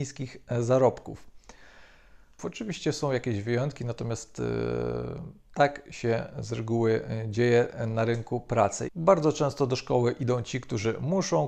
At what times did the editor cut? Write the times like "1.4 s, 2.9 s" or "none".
2.4 s

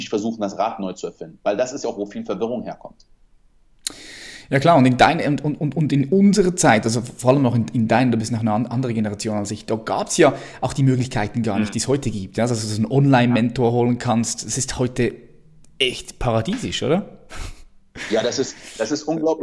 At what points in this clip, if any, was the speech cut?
none

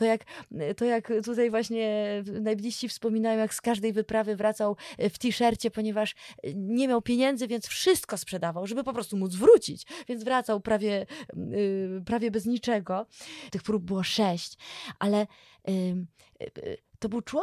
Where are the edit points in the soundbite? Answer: 13.5 s

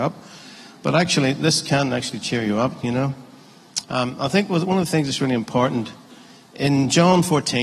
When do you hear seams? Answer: 3.8 s

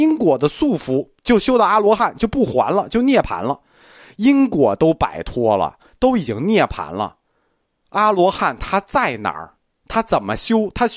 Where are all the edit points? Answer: none

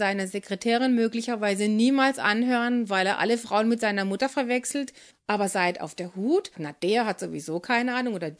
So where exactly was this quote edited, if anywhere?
5.1 s, 6.5 s

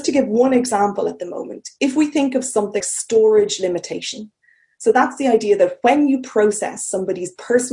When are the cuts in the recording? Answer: 2.8 s

